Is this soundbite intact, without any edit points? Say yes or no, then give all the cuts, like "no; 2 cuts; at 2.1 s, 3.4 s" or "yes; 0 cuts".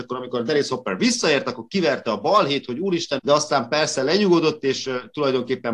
no; 1 cut; at 3.2 s